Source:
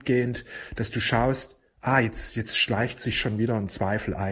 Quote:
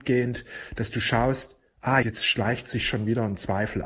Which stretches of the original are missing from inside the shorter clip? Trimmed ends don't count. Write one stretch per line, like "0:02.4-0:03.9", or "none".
0:02.0-0:02.3